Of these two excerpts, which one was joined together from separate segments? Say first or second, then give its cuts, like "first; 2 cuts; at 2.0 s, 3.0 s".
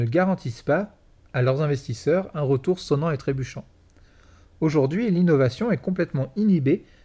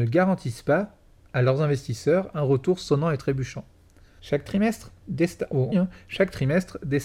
second; 2 cuts; at 4.2 s, 5.7 s